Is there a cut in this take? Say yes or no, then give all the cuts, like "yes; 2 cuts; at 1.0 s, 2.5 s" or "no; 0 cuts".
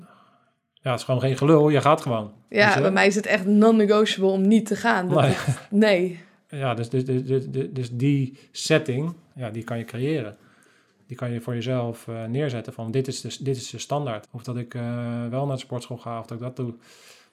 yes; 1 cut; at 14.2 s